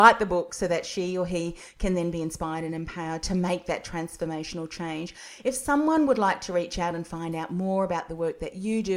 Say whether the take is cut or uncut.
uncut